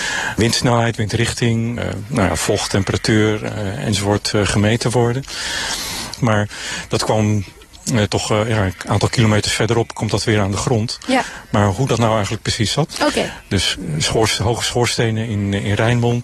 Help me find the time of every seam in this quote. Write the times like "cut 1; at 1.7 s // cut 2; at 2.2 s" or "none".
cut 1; at 1.8 s // cut 2; at 6.2 s // cut 3; at 12.9 s